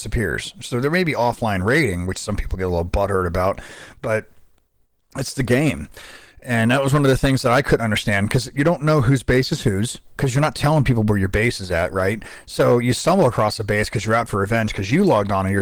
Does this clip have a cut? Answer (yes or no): no